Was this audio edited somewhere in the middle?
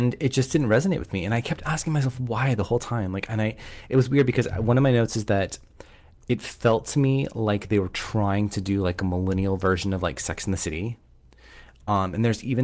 no; 0 cuts

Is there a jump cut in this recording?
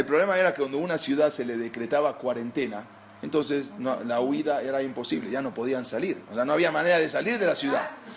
no; 0 cuts

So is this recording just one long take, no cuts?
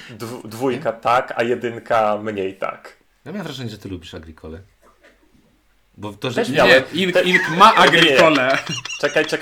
yes; 0 cuts

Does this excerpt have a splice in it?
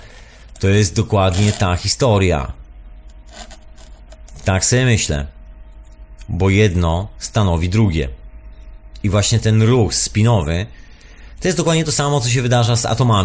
no; 0 cuts

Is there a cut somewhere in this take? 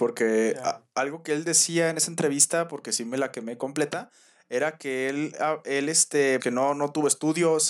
yes; 1 cut; at 6.4 s

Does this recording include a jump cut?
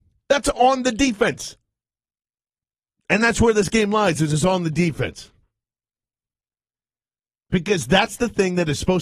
no; 0 cuts

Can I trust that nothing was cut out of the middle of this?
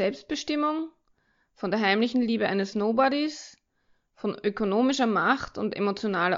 yes; 0 cuts

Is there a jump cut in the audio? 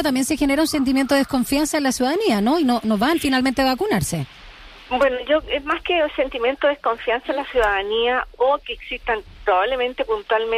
no; 0 cuts

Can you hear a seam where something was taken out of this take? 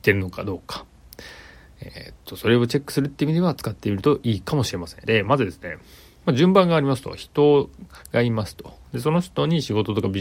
yes; 1 cut; at 5.1 s

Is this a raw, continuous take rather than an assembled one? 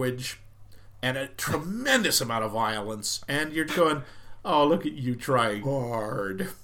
no; 2 cuts; at 3.7 s, 5.6 s

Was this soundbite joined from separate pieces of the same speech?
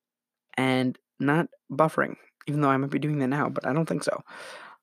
no; 0 cuts

